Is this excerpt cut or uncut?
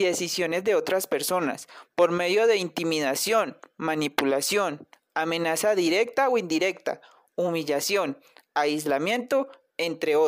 uncut